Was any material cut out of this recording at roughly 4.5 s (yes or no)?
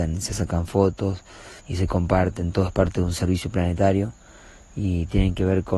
no